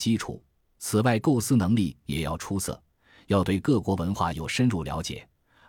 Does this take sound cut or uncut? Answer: uncut